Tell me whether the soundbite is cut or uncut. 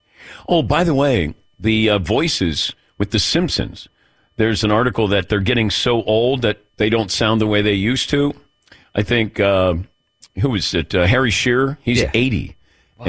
uncut